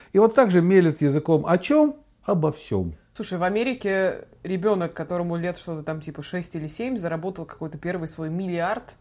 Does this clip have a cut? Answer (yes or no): no